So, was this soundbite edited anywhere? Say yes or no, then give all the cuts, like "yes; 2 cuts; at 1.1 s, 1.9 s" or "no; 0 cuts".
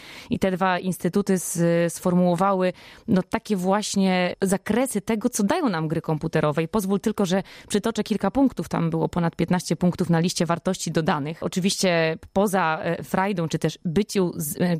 yes; 1 cut; at 13.5 s